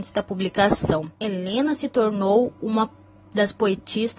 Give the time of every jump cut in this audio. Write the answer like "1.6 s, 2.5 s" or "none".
1.1 s